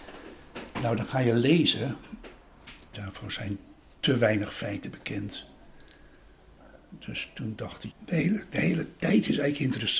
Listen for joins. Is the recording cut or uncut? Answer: cut